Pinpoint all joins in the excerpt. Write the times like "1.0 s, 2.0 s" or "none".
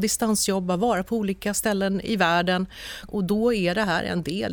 3.1 s